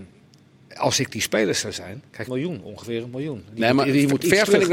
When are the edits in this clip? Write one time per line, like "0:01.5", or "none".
0:02.3